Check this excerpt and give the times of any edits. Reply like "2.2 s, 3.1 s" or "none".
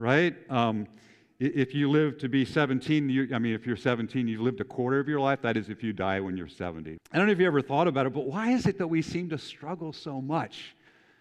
7.0 s